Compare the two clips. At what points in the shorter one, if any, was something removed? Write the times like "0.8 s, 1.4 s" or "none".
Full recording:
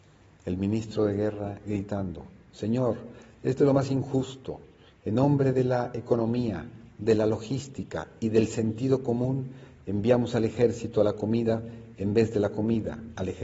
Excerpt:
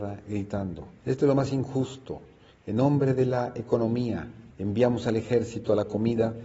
1.0 s, 4.5 s

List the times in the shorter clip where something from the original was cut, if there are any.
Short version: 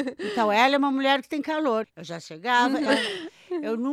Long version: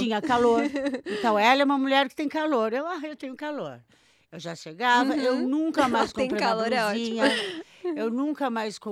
1.8 s, 2.9 s

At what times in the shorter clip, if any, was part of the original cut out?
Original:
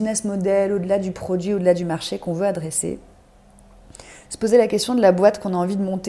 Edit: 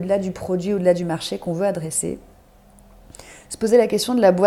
none

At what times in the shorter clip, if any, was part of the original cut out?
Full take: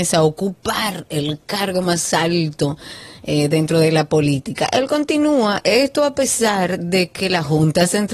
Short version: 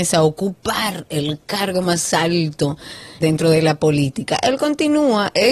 3.2 s

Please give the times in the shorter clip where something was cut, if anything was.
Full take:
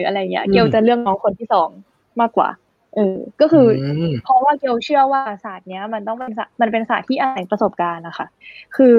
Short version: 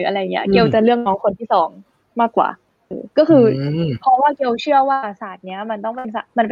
2.9 s

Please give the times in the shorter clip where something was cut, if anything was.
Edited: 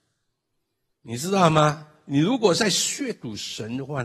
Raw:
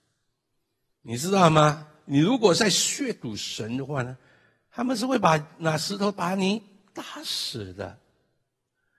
none

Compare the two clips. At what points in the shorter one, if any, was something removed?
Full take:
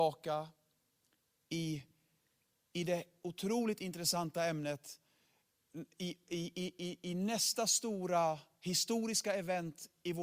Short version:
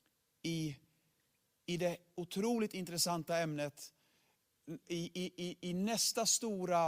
4.8 s

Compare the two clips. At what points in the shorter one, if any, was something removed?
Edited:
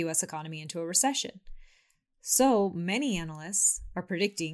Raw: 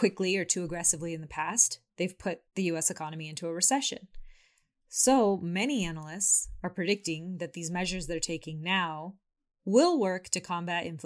none

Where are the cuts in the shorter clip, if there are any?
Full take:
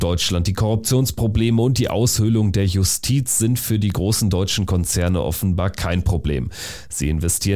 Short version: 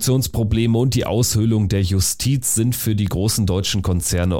none

